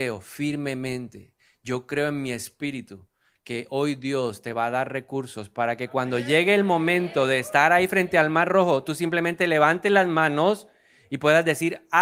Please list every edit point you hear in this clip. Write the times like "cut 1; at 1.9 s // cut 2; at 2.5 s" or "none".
none